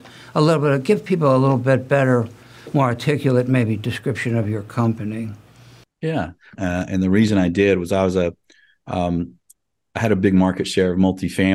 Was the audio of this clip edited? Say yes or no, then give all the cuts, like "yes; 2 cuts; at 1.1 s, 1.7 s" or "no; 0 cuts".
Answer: yes; 1 cut; at 6.5 s